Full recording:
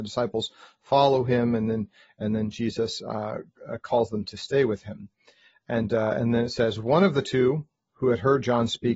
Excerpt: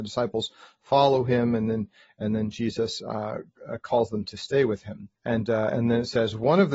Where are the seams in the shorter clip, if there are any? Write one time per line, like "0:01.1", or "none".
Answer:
0:05.2